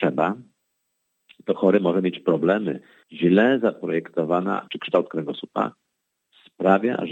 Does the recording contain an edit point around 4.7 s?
yes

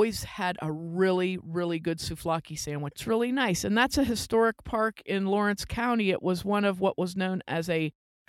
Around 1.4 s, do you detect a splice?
no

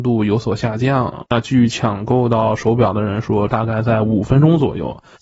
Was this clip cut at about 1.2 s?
no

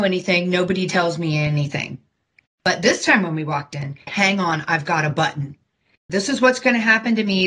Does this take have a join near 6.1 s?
yes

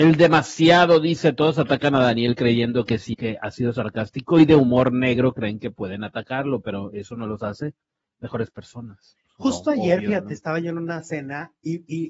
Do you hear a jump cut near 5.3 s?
no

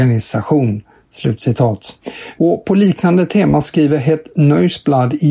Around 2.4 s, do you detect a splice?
yes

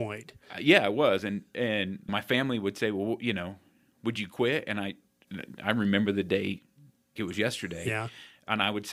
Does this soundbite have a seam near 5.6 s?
no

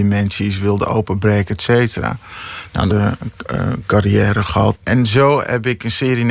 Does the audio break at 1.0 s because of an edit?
no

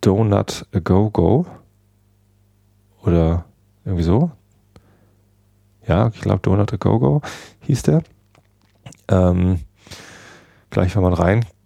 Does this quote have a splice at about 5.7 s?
no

